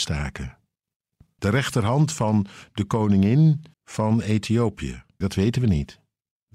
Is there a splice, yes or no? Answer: yes